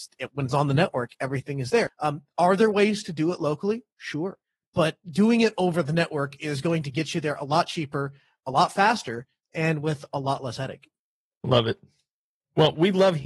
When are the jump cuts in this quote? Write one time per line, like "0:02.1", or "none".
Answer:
0:01.9
0:05.0